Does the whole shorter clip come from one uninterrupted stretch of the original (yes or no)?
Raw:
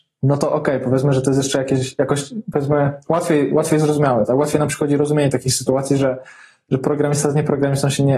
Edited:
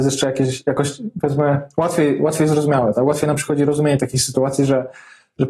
yes